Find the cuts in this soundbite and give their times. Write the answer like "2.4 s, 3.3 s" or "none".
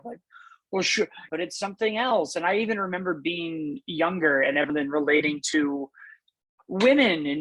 1.3 s, 4.7 s